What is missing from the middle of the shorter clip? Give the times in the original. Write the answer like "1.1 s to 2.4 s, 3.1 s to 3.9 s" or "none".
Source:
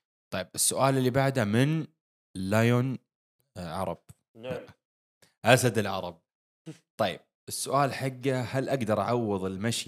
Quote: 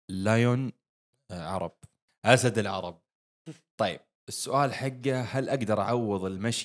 4.3 s to 5.3 s